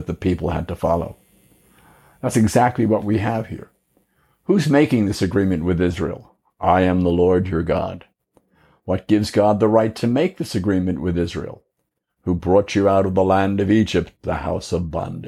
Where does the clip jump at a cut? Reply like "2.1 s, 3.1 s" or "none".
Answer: none

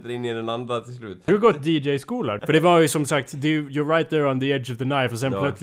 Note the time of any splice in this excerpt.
1.3 s, 2.4 s

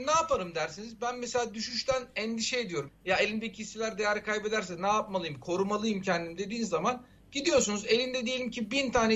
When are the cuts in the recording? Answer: 2.9 s

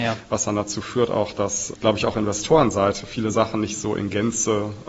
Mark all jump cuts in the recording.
1.7 s

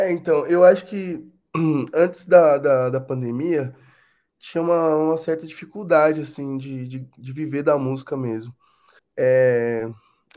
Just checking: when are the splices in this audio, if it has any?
9.0 s

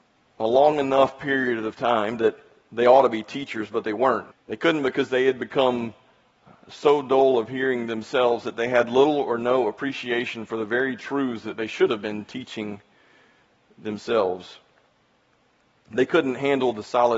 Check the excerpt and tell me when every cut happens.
4.3 s

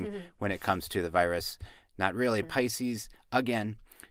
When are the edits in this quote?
2.4 s

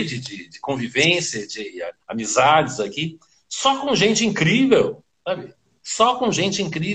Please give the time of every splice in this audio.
2.0 s

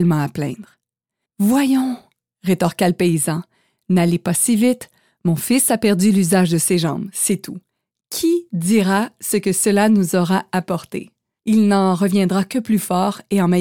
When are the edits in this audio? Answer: 11.4 s

